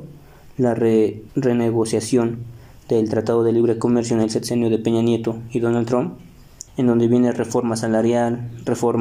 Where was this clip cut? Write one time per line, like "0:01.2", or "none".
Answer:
0:01.3
0:06.7